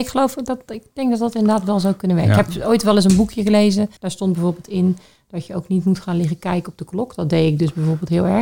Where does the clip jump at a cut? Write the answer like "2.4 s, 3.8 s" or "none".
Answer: 4.0 s